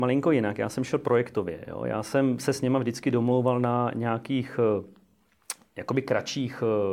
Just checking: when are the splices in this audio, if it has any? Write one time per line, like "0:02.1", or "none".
none